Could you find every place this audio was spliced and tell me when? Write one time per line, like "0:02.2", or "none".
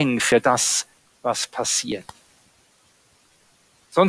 none